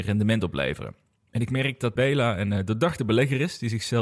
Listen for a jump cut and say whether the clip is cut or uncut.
cut